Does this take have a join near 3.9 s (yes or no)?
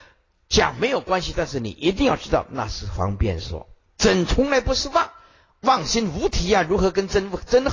no